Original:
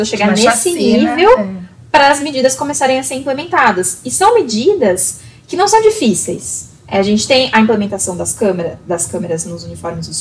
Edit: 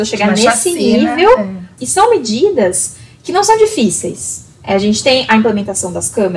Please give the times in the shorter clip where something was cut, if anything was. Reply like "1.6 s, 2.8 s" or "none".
1.8 s